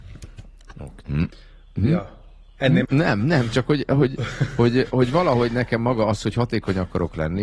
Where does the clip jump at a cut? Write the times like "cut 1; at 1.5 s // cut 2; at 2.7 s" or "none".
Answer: cut 1; at 1.0 s // cut 2; at 2.8 s